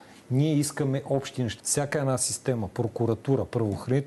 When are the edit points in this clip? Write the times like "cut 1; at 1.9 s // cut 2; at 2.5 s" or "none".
cut 1; at 1.6 s